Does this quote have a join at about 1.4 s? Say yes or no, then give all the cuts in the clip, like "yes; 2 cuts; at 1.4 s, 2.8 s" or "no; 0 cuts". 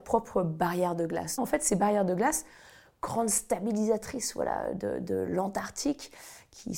yes; 1 cut; at 1.4 s